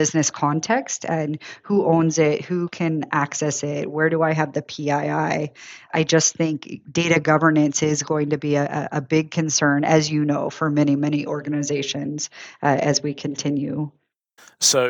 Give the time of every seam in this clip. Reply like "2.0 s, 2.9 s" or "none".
none